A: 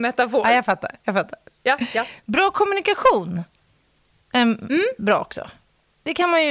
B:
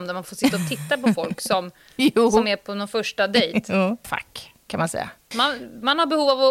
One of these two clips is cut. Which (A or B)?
B